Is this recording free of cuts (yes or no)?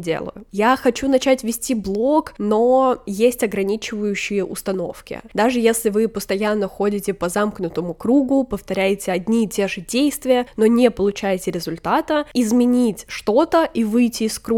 no